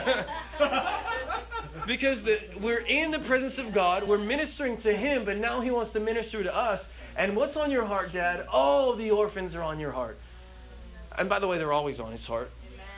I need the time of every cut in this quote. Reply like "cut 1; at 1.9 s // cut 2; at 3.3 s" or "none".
none